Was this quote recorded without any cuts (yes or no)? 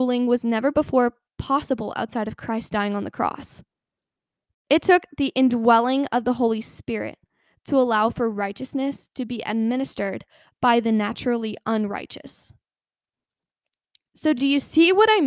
yes